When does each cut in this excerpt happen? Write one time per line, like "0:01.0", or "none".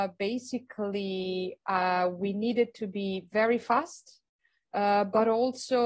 none